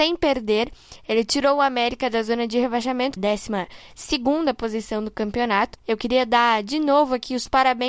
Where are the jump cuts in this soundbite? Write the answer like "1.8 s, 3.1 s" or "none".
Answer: 3.2 s, 5.8 s